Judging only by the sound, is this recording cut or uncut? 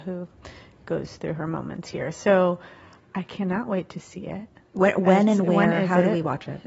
uncut